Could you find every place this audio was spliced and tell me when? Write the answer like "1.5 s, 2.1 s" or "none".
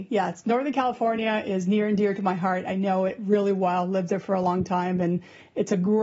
none

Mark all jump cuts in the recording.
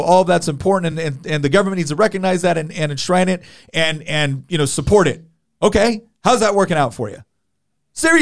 none

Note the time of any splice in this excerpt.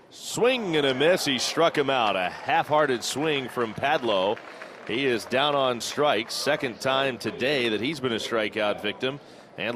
none

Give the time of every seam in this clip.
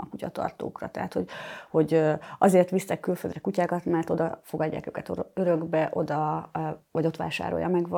none

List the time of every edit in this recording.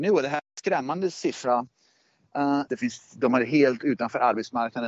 2.7 s

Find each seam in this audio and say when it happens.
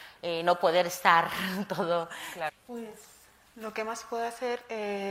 2.5 s

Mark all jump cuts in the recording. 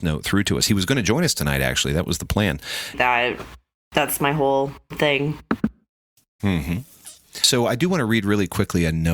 2.9 s, 6.4 s

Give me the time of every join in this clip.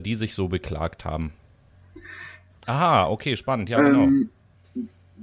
2.5 s

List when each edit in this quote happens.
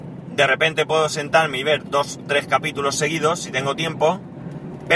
none

